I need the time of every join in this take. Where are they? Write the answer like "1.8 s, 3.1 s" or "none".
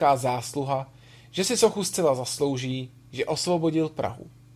none